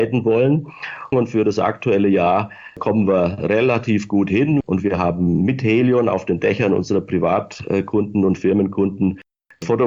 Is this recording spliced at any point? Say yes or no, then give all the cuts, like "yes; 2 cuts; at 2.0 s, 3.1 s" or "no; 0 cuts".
yes; 2 cuts; at 1.1 s, 4.6 s